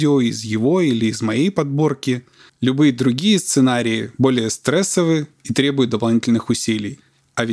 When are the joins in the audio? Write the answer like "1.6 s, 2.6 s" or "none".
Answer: 2.5 s